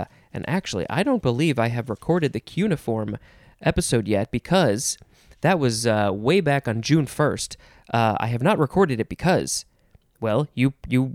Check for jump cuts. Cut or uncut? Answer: uncut